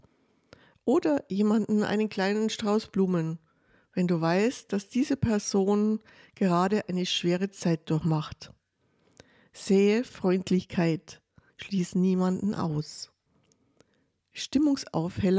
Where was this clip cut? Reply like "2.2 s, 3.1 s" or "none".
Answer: 11.5 s